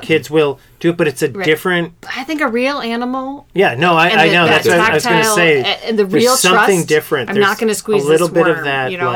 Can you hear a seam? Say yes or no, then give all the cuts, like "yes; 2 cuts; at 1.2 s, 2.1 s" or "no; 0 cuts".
no; 0 cuts